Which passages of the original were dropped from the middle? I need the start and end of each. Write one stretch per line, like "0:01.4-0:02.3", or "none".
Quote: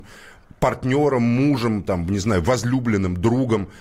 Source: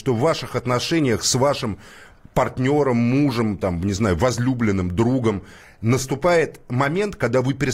none